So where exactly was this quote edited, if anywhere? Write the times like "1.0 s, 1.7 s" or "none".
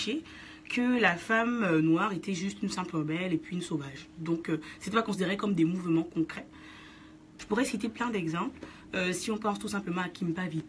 7.4 s